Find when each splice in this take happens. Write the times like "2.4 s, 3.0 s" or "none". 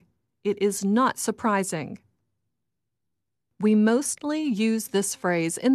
none